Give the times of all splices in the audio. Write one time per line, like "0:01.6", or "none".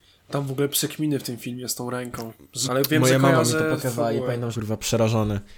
0:02.7
0:04.5

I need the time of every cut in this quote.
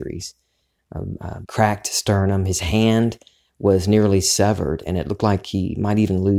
0:01.4

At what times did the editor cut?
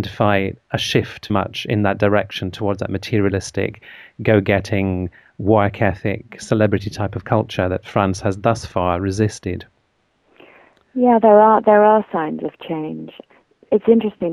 0:01.3

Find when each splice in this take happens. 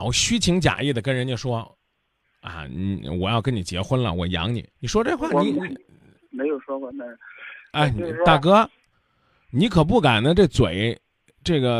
0:04.7

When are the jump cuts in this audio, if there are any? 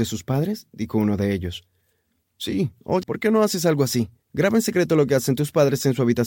0:03.0
0:04.2

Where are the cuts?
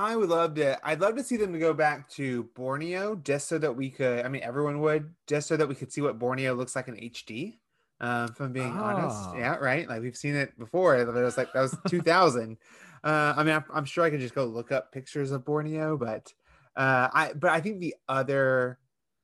none

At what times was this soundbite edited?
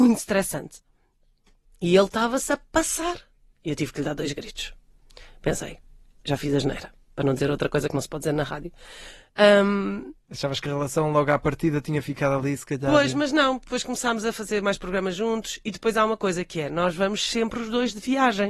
none

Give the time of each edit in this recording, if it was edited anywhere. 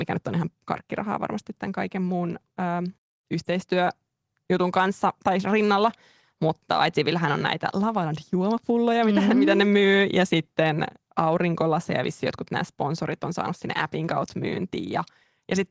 none

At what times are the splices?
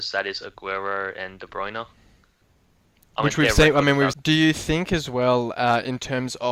0:04.1

